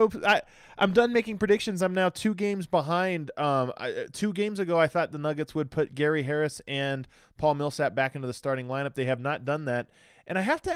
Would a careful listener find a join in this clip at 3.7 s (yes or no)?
no